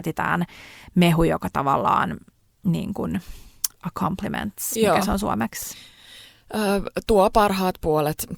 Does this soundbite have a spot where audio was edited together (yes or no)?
no